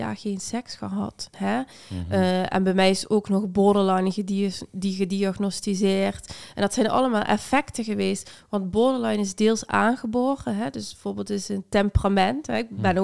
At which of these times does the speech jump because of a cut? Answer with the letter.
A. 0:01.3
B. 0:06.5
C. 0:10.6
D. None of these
A